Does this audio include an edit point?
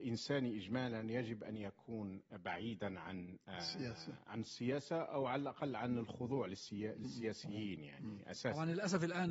yes; 1 cut; at 4.3 s

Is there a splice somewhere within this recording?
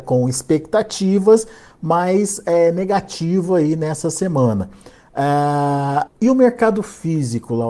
yes; 1 cut; at 6.1 s

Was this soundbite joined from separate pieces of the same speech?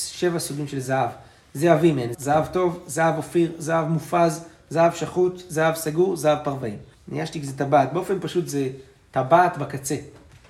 yes; 2 cuts; at 2.1 s, 6.9 s

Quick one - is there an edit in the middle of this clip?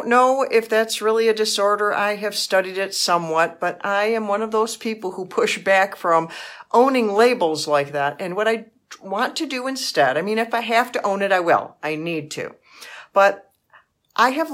no; 0 cuts

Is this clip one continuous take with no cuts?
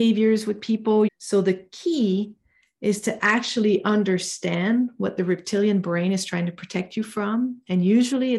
no; 1 cut; at 1.1 s

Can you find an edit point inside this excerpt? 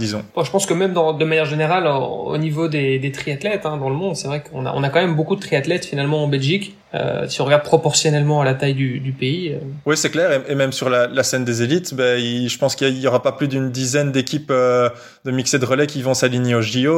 no; 0 cuts

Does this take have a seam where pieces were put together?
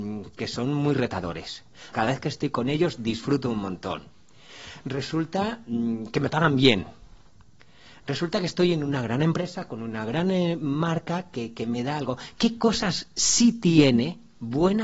yes; 1 cut; at 1.9 s

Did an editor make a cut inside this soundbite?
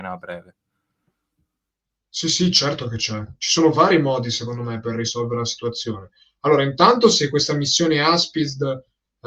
no; 0 cuts

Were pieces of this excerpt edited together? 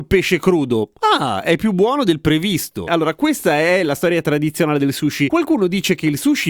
yes; 1 cut; at 2.9 s

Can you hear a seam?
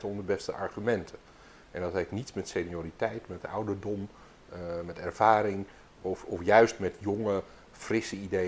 no; 0 cuts

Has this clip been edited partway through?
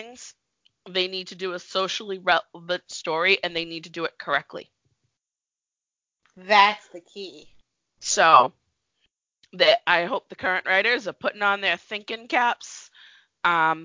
no; 0 cuts

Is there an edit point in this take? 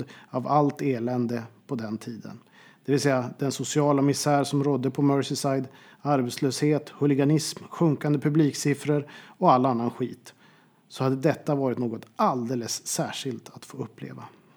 no; 0 cuts

